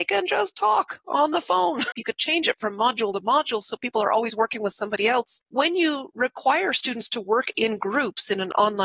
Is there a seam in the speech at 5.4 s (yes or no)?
yes